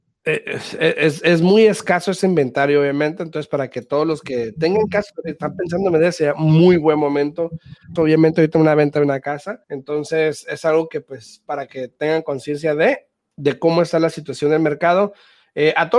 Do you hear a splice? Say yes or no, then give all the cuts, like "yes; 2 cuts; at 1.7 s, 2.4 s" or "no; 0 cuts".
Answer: yes; 2 cuts; at 8.0 s, 9.6 s